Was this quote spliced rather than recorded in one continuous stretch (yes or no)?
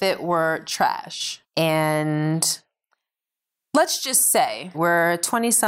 yes